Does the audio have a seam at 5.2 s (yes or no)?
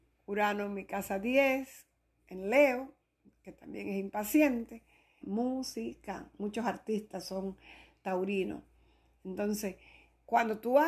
yes